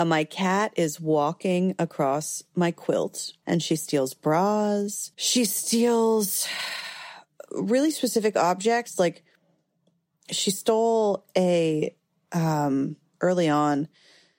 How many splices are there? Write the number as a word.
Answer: two